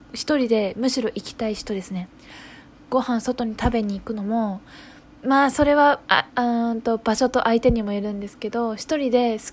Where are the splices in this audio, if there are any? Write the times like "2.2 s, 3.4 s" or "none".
none